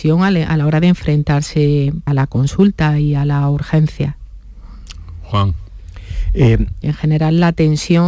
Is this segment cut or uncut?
cut